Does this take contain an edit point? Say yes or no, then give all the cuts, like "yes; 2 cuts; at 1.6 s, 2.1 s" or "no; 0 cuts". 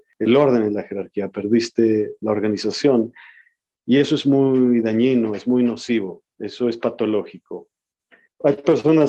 no; 0 cuts